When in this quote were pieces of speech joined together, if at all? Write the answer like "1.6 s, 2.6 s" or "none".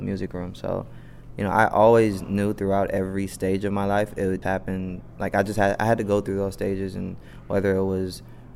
4.4 s